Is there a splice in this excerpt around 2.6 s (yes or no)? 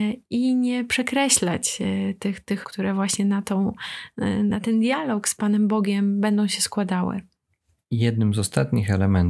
yes